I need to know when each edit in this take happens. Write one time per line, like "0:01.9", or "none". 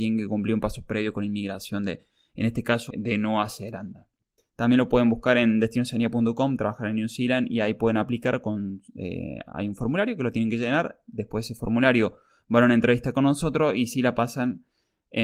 0:02.9
0:04.4